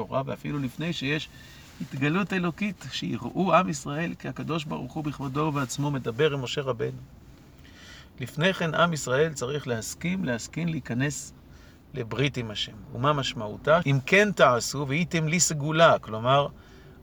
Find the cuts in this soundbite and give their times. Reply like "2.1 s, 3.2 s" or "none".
13.8 s